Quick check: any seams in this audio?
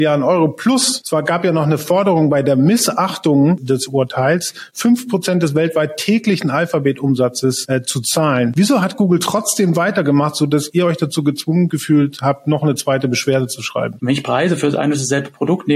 yes; 1 cut; at 14.0 s

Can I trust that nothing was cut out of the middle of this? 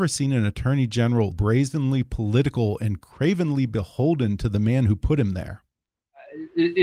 no; 1 cut; at 1.3 s

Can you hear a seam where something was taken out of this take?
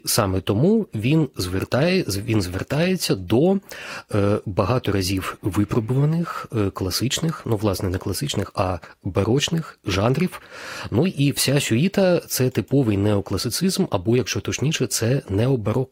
no; 0 cuts

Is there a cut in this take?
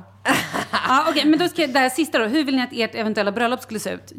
no; 0 cuts

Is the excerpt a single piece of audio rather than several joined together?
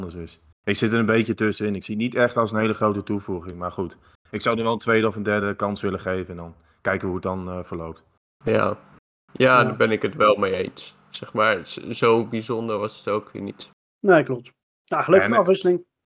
yes; 0 cuts

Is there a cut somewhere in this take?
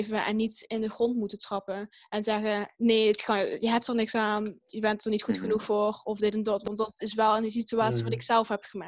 no; 0 cuts

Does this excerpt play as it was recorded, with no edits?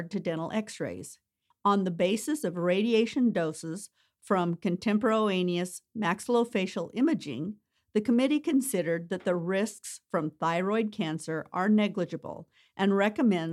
no; 1 cut; at 1.5 s

